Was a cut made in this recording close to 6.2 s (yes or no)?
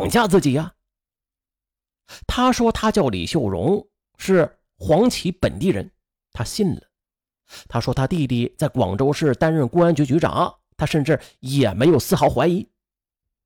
no